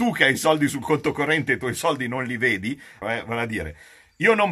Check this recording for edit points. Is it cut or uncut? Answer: cut